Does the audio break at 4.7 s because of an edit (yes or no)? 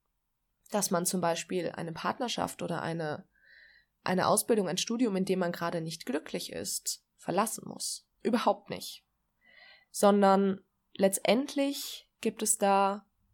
no